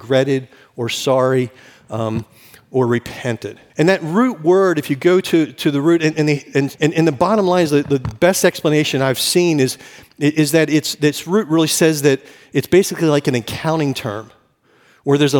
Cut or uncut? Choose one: cut